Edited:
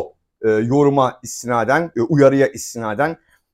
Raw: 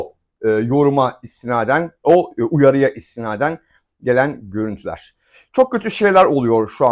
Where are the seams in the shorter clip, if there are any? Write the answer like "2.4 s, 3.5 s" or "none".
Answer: 1.9 s